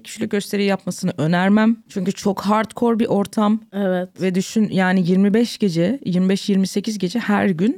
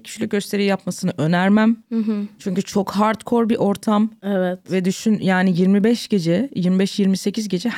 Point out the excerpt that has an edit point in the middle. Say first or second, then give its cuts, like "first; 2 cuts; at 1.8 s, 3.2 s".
first; 1 cut; at 1.9 s